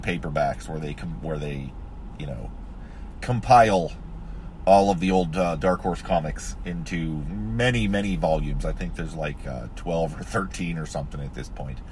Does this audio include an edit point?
no; 0 cuts

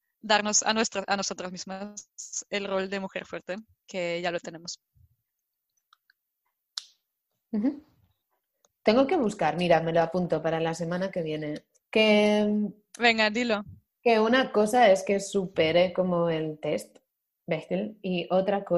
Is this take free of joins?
no; 2 cuts; at 8.7 s, 11.8 s

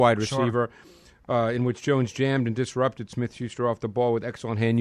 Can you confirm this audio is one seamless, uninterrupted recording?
yes; 0 cuts

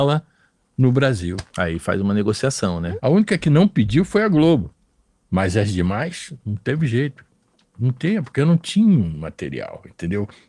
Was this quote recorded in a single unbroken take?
no; 1 cut; at 3.0 s

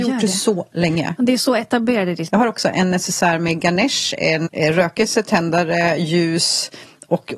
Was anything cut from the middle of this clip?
yes; 2 cuts; at 2.3 s, 4.5 s

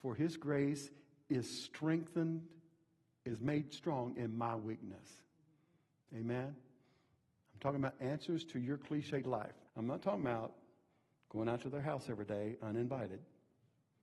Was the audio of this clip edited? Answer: yes; 1 cut; at 9.7 s

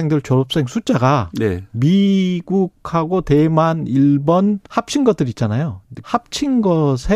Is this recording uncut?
no; 2 cuts; at 4.6 s, 6.0 s

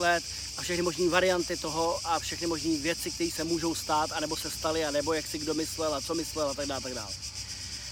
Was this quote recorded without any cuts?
yes; 0 cuts

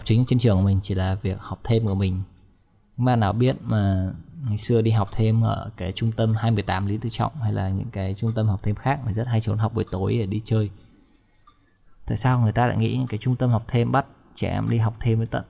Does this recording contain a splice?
no; 0 cuts

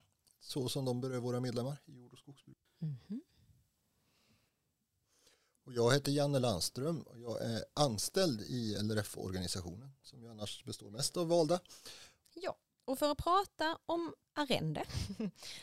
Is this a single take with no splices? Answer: no; 2 cuts; at 2.7 s, 12.2 s

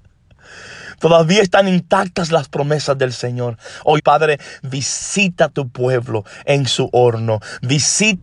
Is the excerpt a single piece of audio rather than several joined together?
no; 1 cut; at 4.0 s

